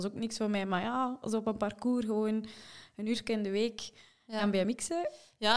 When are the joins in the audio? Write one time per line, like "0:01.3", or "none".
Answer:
none